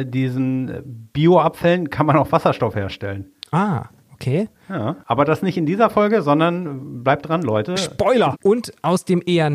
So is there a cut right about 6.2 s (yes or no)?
no